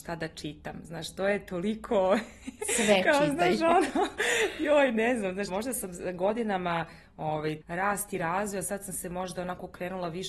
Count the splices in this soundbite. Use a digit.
2